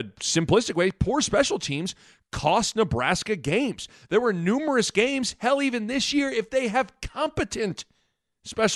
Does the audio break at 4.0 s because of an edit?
no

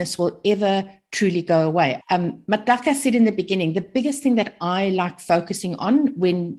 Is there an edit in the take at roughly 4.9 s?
no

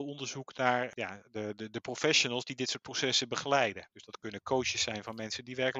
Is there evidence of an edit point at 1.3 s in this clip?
no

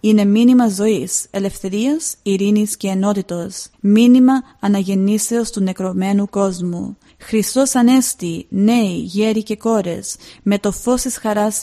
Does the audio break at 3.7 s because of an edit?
yes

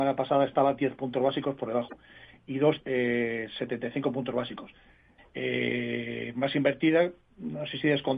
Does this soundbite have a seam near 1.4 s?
no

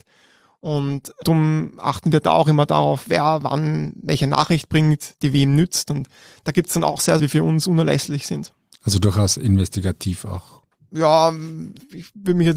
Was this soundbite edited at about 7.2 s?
yes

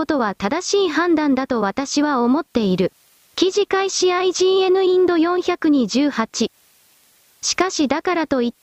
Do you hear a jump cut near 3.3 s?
yes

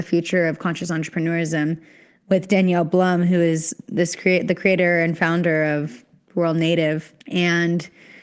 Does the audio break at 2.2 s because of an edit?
no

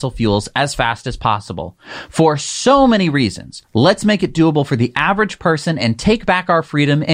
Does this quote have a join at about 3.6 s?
yes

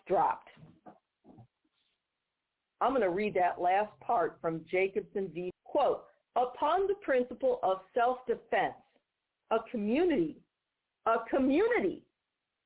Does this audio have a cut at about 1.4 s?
no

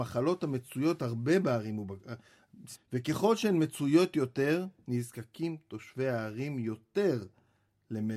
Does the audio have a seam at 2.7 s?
yes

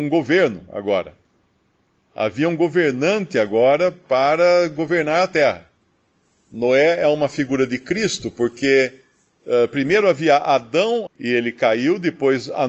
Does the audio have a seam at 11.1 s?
yes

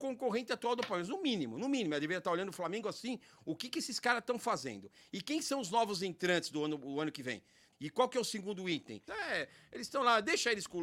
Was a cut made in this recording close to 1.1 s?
no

